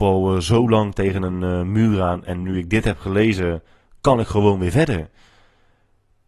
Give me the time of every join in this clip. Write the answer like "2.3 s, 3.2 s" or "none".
none